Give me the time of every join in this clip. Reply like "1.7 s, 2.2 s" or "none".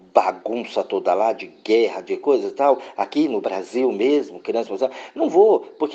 none